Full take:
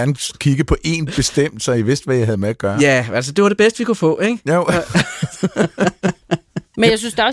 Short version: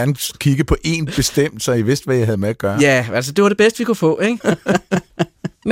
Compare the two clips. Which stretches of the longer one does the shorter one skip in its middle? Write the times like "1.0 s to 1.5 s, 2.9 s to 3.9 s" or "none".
4.4 s to 5.5 s